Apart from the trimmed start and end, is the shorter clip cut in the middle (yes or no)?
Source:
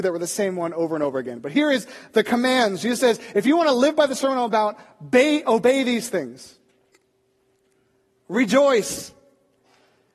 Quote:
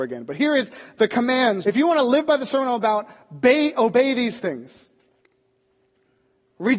yes